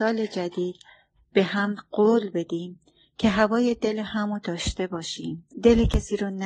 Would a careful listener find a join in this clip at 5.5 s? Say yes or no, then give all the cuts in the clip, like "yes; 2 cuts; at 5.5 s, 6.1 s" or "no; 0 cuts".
yes; 1 cut; at 5.5 s